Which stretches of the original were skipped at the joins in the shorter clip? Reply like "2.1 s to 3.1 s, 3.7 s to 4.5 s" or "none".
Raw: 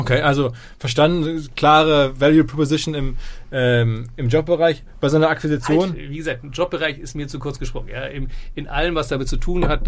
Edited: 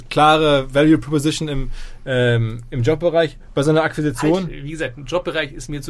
none